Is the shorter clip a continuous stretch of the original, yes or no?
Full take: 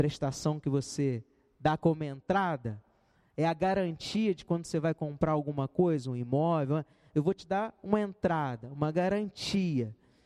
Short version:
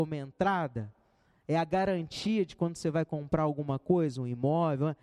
yes